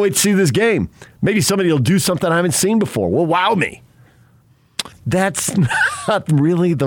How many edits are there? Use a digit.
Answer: 1